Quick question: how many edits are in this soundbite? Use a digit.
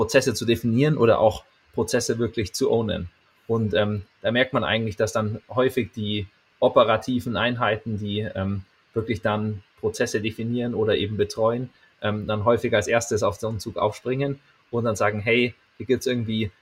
0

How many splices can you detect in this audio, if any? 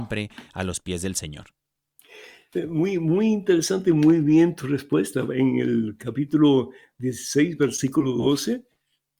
0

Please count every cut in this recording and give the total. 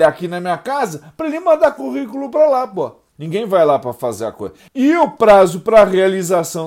2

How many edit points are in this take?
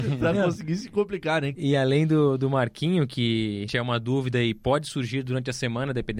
2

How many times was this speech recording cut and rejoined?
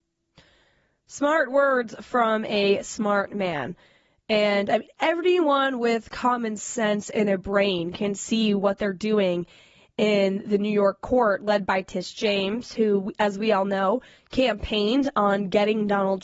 0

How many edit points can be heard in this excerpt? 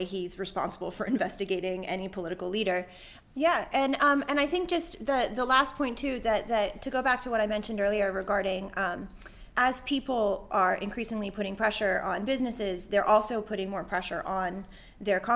2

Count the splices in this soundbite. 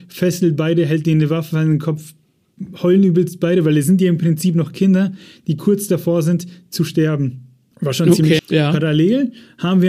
1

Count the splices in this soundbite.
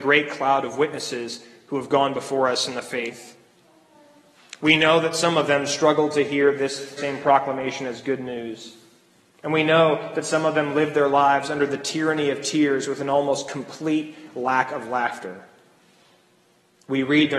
1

